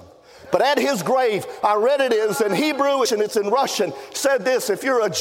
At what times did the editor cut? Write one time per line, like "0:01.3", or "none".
0:03.1